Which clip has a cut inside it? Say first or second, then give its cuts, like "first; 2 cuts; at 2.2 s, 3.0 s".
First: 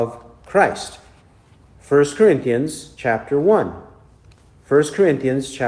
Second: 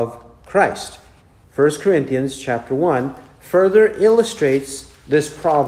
second; 1 cut; at 1.4 s